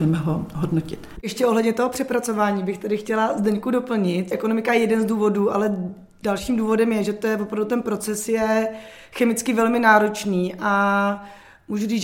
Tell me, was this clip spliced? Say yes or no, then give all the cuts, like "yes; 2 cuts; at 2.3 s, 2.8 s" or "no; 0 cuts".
no; 0 cuts